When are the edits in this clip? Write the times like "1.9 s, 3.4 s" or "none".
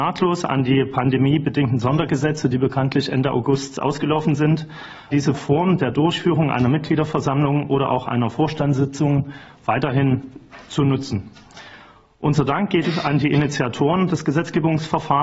5.1 s